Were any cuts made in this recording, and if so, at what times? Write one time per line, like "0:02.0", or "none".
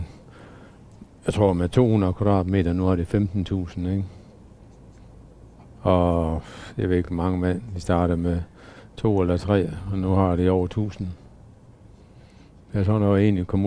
none